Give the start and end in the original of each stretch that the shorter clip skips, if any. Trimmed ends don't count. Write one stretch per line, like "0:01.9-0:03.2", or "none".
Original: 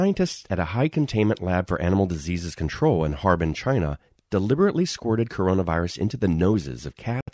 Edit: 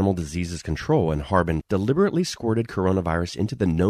0:03.5-0:04.2

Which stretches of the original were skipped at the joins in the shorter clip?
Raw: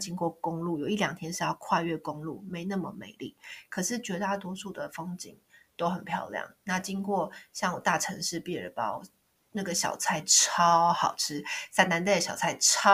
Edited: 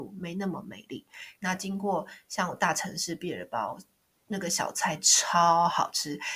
0:03.7-0:06.6

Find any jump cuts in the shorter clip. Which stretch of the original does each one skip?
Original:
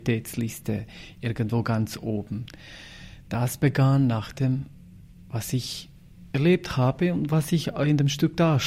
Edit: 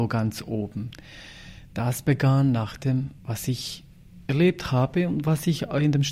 0:04.7-0:05.2

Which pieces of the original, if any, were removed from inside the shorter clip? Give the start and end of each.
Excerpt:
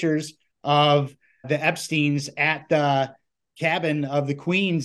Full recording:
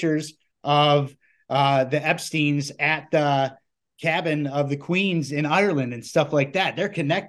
0:01.4-0:01.9

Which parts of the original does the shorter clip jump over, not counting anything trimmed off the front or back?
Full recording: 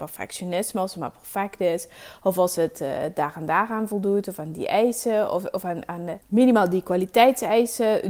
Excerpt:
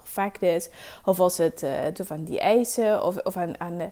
0:03.1-0:04.2

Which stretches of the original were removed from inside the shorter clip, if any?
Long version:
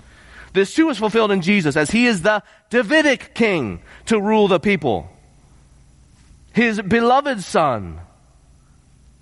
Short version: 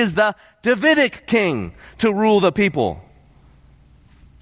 none

